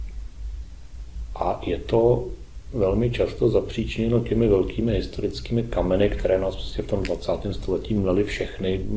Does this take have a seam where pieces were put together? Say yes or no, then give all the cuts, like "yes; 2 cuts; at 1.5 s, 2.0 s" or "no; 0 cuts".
no; 0 cuts